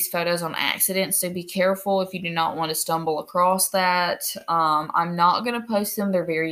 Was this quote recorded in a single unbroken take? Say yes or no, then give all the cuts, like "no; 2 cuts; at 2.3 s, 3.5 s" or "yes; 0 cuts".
yes; 0 cuts